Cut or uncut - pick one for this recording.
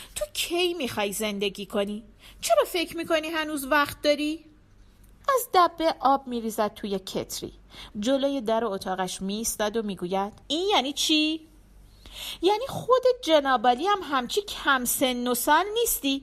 cut